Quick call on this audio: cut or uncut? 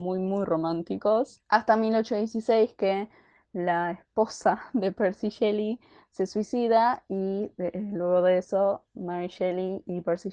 uncut